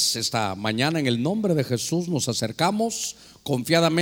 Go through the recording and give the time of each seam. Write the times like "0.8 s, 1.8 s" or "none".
none